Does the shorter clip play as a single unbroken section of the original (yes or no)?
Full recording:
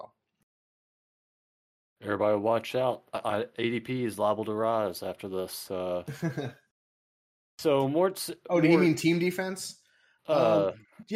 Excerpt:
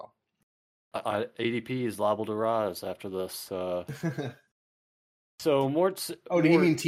no